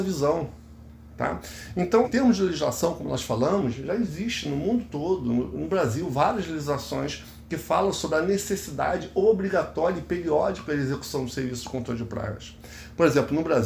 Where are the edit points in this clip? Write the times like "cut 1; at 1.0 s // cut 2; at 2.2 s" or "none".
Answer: cut 1; at 2.0 s